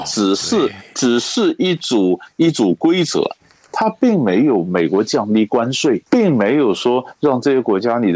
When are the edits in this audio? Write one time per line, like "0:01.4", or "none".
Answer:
0:03.6
0:06.1